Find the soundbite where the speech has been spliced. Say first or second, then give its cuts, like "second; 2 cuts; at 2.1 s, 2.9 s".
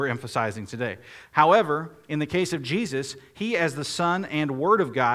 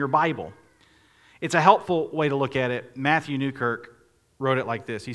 first; 1 cut; at 1.2 s